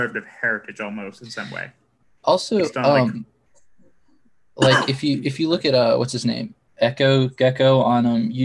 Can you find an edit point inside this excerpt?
no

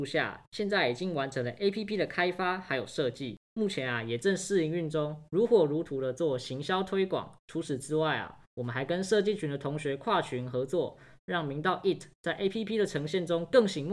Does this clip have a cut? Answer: yes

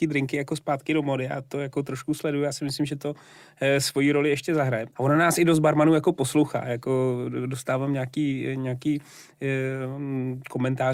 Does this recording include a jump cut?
yes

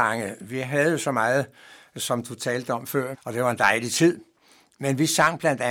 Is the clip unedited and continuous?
no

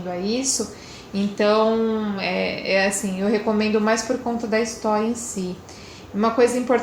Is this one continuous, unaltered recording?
yes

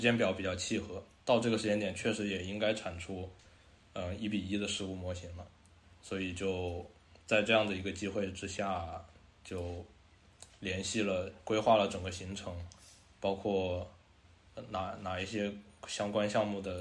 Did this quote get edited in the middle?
no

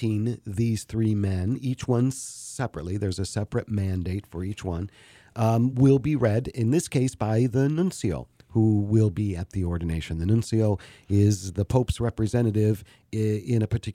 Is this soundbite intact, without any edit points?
yes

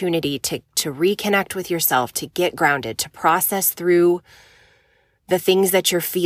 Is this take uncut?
yes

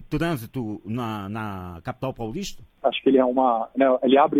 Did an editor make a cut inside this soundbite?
yes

